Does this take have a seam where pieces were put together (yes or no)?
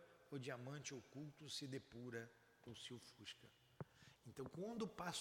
yes